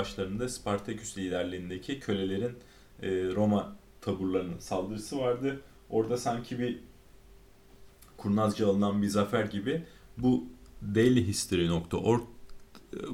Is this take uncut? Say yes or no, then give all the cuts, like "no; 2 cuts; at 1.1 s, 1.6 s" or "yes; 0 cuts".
yes; 0 cuts